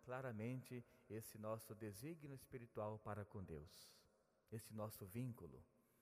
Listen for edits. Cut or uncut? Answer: uncut